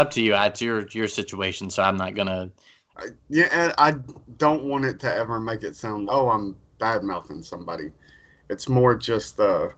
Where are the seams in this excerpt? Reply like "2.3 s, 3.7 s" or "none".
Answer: 2.9 s, 6.1 s